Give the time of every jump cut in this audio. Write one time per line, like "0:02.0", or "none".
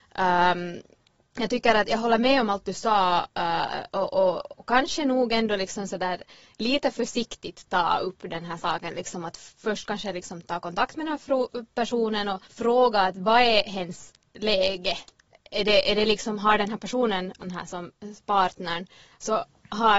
0:12.4
0:17.4